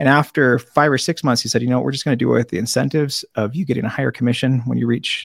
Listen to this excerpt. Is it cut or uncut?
uncut